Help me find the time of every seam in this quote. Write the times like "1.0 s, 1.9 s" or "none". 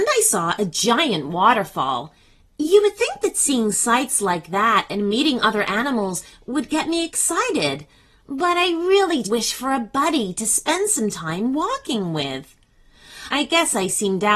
9.2 s, 13.3 s

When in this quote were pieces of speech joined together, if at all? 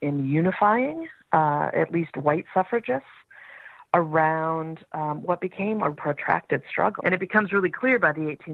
5.9 s, 7.0 s

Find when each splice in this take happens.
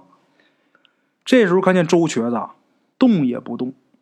2.9 s

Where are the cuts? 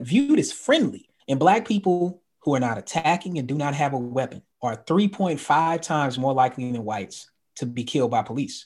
1.2 s, 4.5 s

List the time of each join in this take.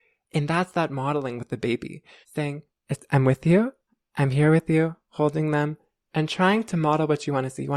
2.2 s

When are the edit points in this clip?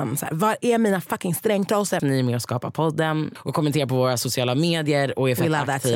2.0 s, 3.4 s

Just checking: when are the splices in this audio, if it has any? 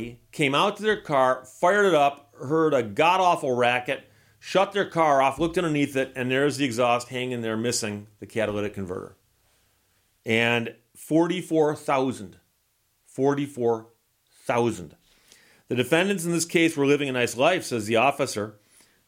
none

